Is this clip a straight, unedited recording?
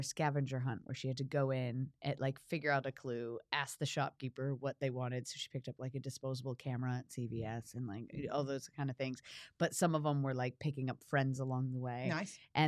yes; 0 cuts

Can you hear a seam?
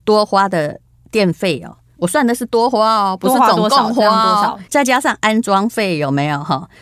yes; 1 cut; at 4.7 s

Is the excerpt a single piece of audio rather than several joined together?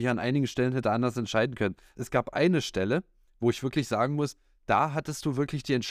yes; 0 cuts

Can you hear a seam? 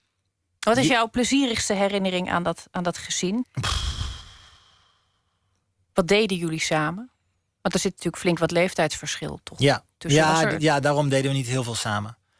yes; 1 cut; at 3.4 s

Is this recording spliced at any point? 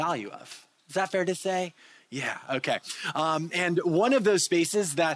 no; 0 cuts

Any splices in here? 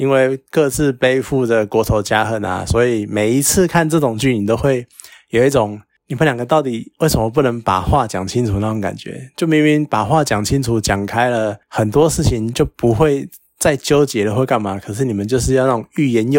no; 0 cuts

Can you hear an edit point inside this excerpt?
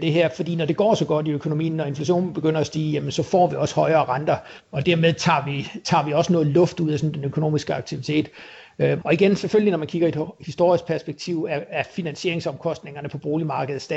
yes; 1 cut; at 9.0 s

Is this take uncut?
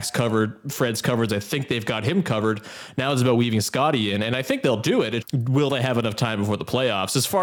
no; 2 cuts; at 1.3 s, 5.2 s

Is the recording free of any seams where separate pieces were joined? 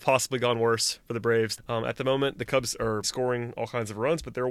no; 2 cuts; at 1.6 s, 3.0 s

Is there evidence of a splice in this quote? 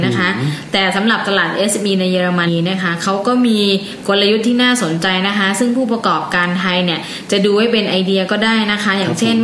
yes; 1 cut; at 2.5 s

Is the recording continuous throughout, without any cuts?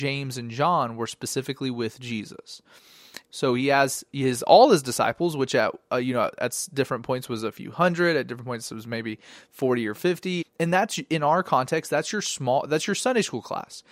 no; 2 cuts; at 3.3 s, 10.4 s

